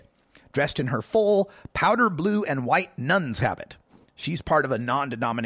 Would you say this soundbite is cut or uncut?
uncut